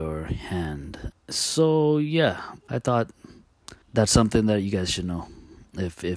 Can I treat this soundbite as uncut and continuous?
no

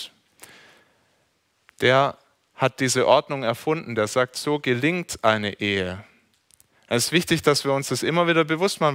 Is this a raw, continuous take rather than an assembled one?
yes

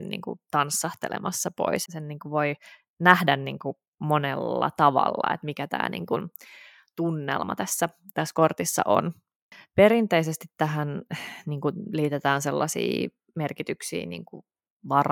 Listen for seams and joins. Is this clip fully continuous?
no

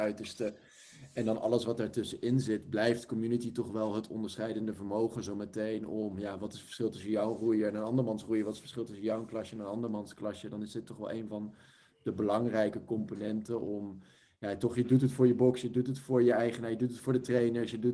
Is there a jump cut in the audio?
no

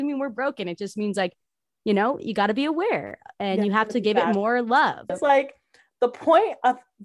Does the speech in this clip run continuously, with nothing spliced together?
no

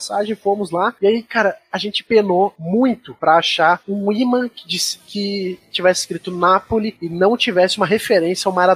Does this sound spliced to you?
no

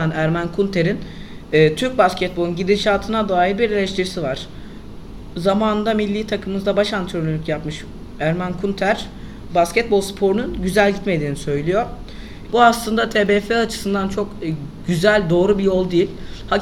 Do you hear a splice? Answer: yes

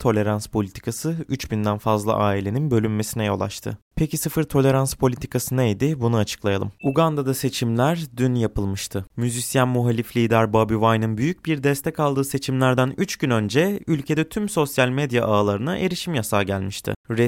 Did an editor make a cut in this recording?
yes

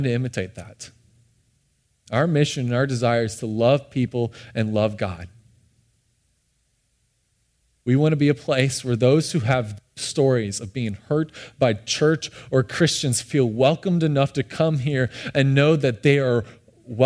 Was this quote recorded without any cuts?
yes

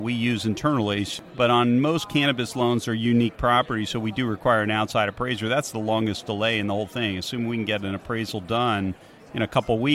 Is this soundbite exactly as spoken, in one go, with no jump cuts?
yes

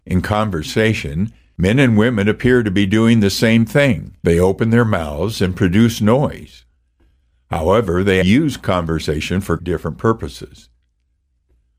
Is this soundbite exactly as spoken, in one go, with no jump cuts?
no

